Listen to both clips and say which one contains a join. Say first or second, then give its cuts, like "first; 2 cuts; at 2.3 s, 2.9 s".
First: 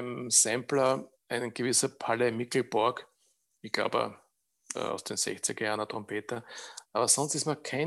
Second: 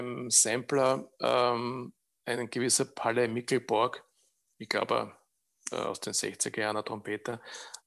first; 1 cut; at 1.1 s